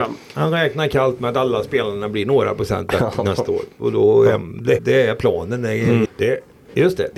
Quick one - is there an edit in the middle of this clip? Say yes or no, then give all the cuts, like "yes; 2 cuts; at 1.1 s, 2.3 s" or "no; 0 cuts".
yes; 2 cuts; at 4.8 s, 6.1 s